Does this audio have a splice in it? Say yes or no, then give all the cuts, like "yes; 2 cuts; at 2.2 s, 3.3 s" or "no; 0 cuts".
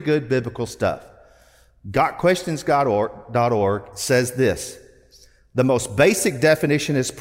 no; 0 cuts